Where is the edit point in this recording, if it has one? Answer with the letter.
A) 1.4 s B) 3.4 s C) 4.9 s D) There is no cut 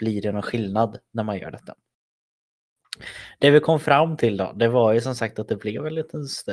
D